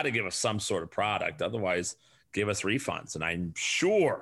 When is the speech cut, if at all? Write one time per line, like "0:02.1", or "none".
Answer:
none